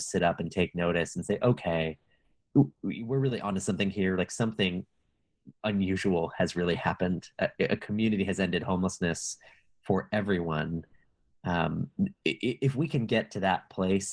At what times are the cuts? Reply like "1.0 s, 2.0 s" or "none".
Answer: none